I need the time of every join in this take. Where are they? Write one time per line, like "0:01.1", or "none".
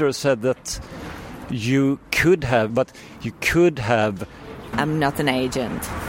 0:02.7
0:04.7